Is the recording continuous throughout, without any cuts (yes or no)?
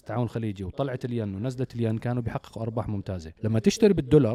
no